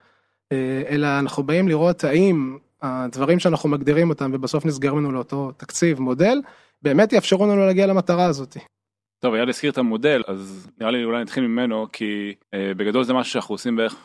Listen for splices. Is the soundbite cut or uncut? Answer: cut